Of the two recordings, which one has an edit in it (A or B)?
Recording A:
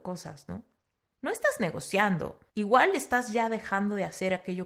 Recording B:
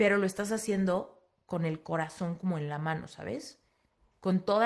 A